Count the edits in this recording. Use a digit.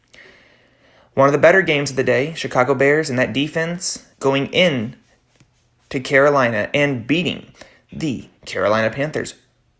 1